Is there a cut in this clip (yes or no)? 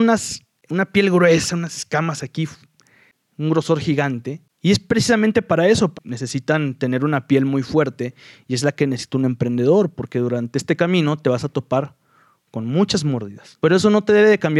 yes